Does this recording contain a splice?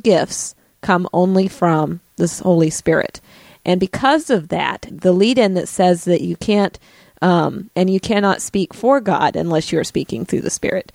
yes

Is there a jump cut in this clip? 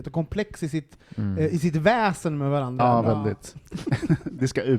yes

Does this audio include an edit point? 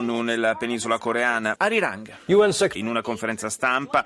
yes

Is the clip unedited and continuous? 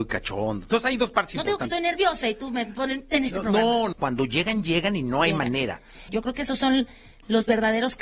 no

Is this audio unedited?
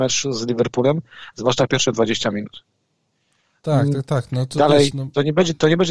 yes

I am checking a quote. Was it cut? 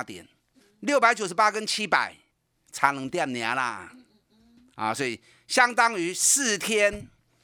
no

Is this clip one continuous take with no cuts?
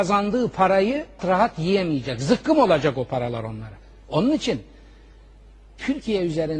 no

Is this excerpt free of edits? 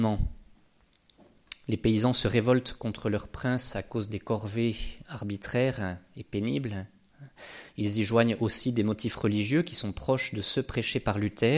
no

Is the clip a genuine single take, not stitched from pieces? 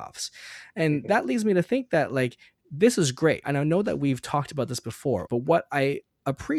no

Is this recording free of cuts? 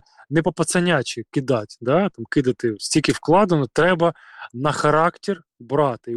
yes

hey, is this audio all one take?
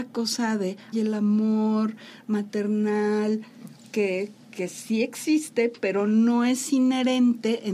no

